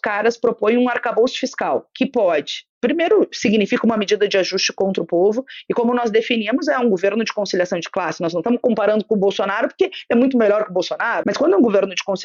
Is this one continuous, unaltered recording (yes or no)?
no